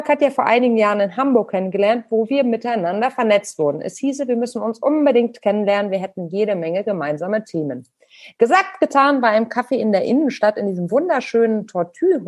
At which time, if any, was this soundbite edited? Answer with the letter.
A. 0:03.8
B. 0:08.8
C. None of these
C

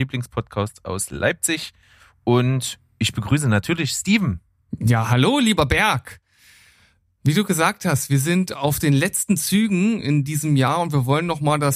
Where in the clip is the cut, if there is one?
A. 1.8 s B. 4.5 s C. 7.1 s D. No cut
D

